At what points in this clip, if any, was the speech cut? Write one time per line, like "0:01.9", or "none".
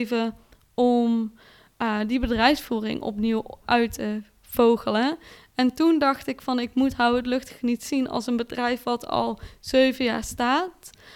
0:03.6